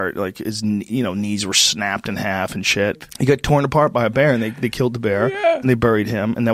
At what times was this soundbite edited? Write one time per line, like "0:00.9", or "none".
none